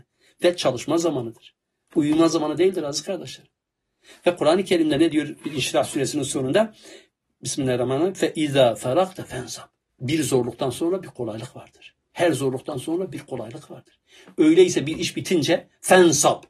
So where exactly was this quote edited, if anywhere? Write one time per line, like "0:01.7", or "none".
0:09.9